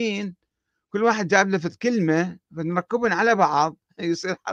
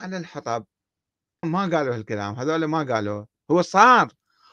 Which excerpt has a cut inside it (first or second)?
second